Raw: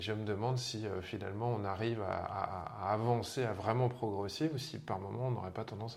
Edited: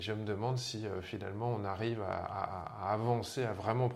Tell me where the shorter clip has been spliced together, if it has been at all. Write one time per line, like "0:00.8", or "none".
none